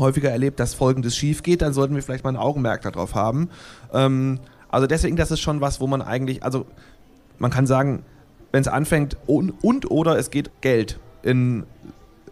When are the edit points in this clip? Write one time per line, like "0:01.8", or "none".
0:09.2
0:10.5